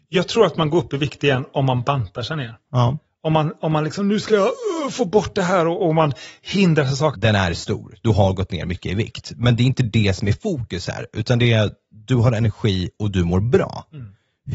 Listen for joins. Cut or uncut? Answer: cut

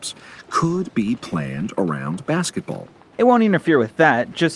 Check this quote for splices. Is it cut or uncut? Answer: cut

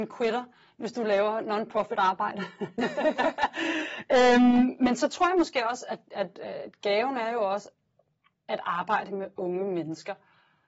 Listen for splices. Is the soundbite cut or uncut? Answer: uncut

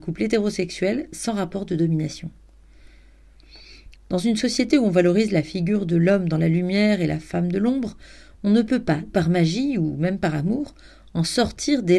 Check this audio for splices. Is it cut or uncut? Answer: cut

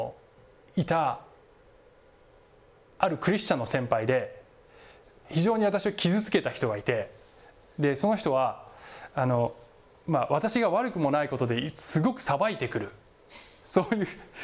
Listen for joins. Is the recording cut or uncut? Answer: cut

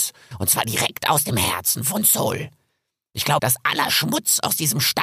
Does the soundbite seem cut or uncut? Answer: cut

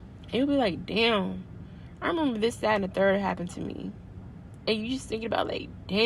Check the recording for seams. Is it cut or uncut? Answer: cut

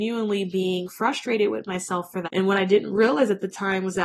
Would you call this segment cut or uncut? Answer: cut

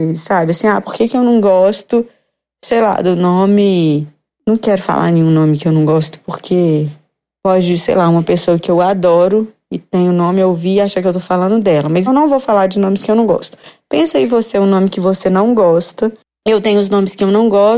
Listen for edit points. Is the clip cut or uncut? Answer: cut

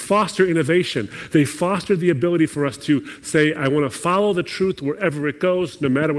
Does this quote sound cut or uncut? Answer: uncut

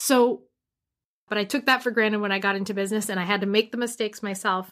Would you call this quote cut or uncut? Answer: cut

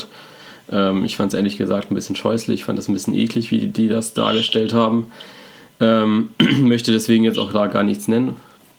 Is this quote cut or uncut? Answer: uncut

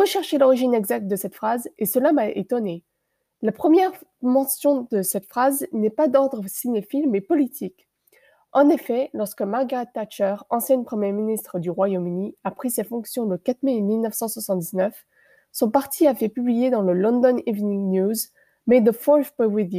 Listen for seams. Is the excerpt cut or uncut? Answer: uncut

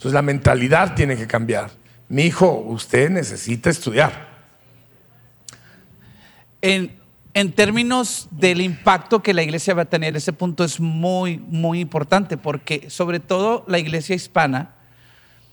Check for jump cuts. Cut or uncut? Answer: uncut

